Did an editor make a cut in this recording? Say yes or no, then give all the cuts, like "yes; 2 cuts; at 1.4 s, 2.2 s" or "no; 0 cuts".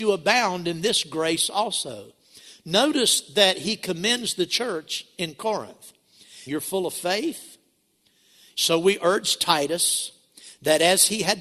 yes; 2 cuts; at 6.5 s, 8.5 s